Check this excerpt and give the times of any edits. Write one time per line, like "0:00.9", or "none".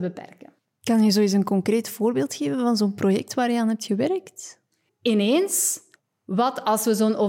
0:04.9